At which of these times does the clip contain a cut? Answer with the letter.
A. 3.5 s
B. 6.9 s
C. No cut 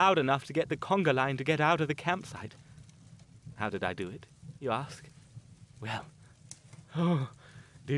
C